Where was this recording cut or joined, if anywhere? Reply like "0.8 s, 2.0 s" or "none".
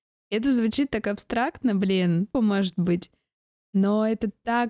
2.3 s